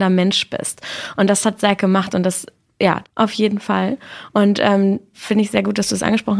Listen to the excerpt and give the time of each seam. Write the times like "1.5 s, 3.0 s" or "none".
3.0 s, 5.1 s